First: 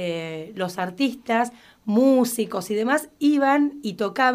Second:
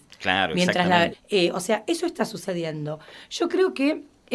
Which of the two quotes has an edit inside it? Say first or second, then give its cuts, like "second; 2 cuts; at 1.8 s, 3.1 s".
second; 1 cut; at 1.1 s